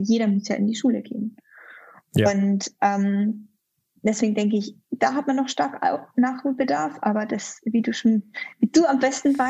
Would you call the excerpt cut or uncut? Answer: uncut